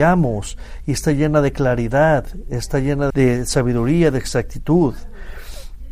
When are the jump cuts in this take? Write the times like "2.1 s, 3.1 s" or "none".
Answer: 3.1 s